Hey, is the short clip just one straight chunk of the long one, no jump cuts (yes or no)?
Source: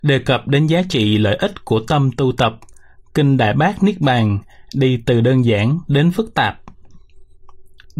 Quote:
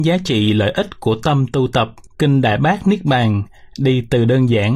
no